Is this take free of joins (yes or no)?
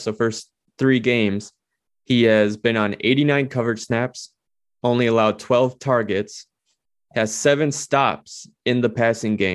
yes